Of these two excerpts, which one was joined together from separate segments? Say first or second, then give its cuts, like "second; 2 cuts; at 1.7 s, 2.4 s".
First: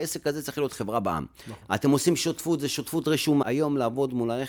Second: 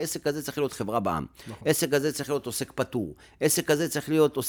first; 2 cuts; at 1.6 s, 3.4 s